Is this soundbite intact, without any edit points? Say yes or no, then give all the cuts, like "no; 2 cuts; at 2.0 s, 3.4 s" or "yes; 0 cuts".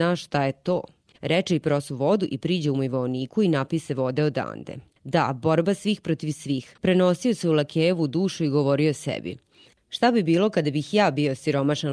no; 2 cuts; at 1.1 s, 6.8 s